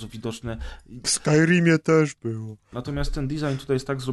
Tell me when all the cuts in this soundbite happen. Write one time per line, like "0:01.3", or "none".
0:01.0
0:02.7

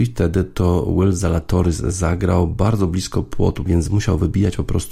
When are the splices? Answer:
0:03.7

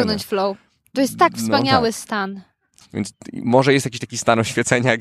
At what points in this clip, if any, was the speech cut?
0:02.8

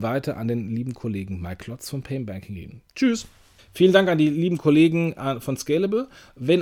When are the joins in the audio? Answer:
0:03.6

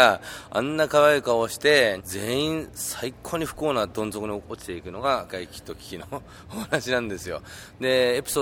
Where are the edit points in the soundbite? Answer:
0:02.0
0:05.3

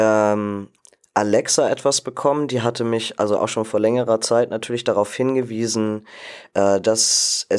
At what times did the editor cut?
none

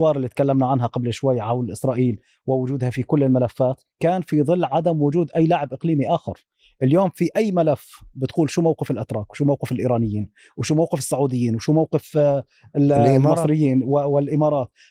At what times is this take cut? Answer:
0:03.9

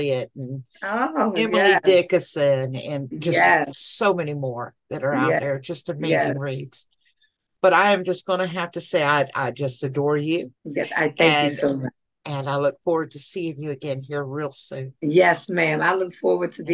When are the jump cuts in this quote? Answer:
0:10.6
0:12.2
0:15.0

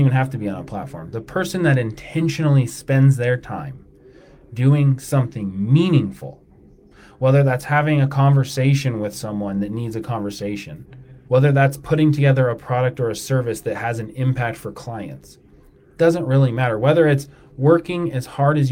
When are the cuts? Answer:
0:11.3

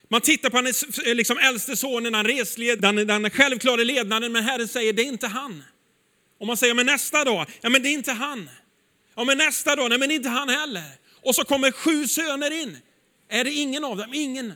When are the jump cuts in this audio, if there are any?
0:02.8

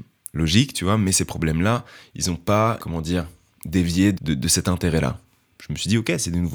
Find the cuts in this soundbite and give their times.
0:02.8
0:04.1

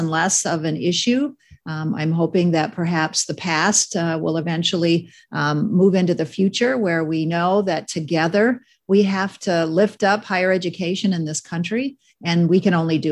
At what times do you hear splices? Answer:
none

